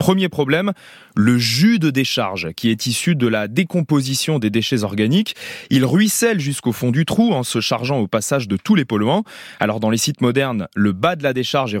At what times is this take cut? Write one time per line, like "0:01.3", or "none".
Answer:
none